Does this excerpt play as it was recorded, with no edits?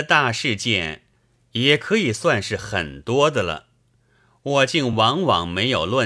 yes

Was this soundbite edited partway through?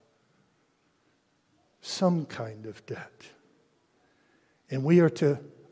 no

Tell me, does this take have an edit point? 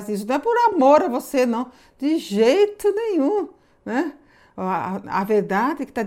no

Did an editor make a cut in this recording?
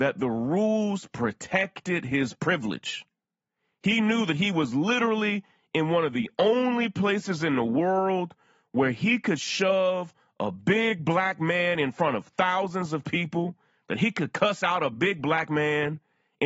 no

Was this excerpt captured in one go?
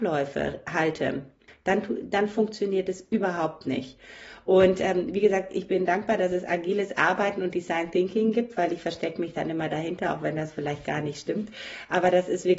yes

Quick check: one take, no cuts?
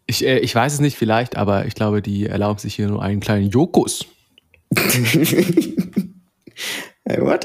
no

